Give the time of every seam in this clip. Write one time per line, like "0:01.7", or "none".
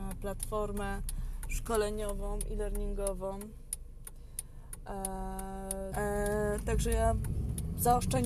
0:05.9